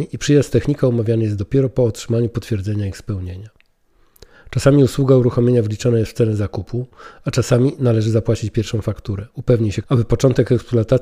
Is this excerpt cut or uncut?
cut